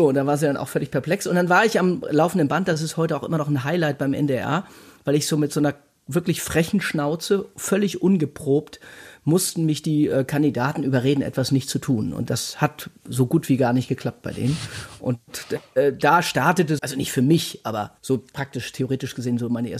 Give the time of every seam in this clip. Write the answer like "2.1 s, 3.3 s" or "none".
16.8 s, 18.0 s